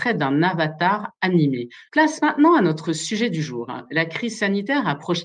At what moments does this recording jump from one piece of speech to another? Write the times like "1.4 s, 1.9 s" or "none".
1.9 s